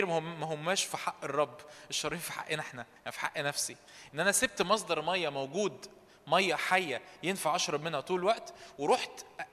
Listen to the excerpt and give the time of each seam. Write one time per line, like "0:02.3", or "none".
0:03.0